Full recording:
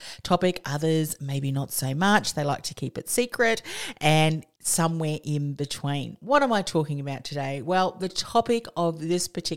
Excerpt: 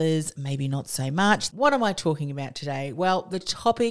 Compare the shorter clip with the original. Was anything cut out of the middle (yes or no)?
yes